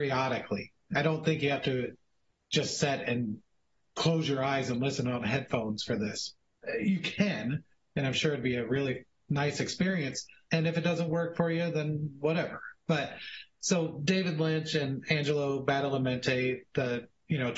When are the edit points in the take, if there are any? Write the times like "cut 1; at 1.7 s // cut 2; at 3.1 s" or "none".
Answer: cut 1; at 10.5 s